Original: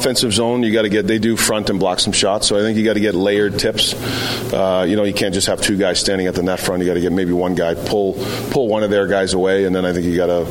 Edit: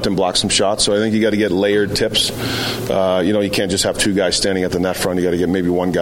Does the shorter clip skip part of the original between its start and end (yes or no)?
no